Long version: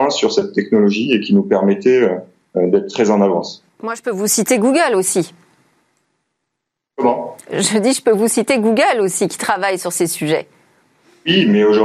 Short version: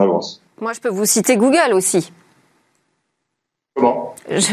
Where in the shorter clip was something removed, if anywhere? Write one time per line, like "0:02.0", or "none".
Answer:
none